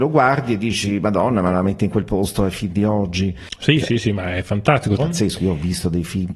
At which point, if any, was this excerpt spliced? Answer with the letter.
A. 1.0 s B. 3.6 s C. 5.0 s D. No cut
C